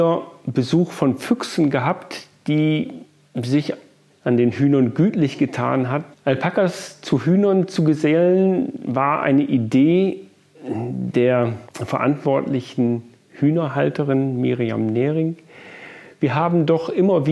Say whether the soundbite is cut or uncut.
cut